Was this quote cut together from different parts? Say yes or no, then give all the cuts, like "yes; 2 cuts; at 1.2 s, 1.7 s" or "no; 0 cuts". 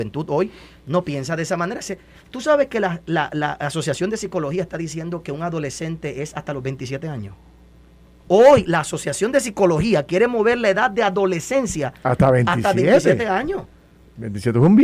no; 0 cuts